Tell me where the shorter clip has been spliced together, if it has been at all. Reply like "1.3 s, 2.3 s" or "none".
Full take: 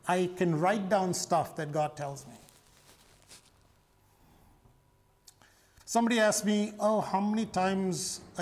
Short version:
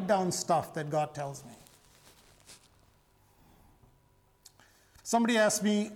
none